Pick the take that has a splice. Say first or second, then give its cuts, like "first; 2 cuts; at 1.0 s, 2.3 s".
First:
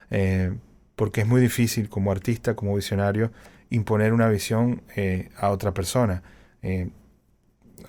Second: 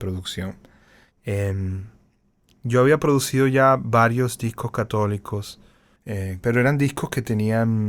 second; 2 cuts; at 1.2 s, 6.4 s